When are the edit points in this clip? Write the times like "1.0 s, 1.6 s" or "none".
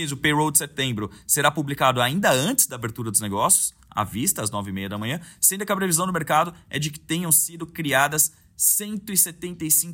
none